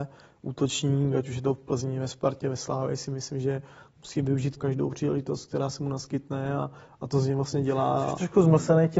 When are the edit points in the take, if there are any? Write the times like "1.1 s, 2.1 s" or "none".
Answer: 4.6 s